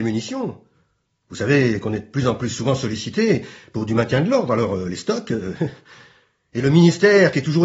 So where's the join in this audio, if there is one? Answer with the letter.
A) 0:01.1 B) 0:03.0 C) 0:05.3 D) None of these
D